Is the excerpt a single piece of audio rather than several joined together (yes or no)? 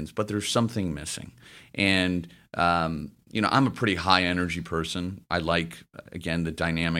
yes